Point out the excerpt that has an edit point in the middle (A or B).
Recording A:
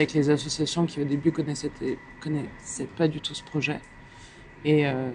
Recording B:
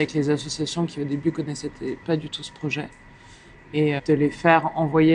B